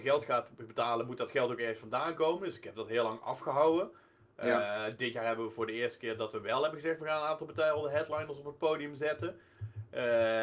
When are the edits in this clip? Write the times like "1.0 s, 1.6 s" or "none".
none